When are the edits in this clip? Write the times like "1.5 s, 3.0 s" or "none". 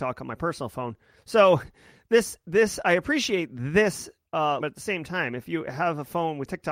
4.6 s